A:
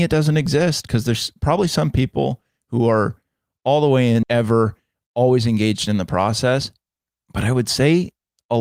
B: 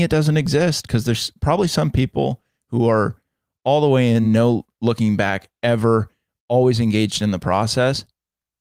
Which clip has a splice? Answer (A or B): A